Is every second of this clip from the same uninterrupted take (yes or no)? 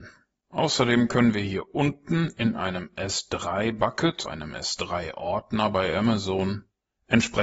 no